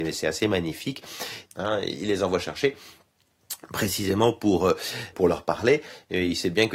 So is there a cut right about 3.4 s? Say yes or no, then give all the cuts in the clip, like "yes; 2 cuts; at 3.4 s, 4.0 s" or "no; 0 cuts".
no; 2 cuts; at 1.5 s, 5.1 s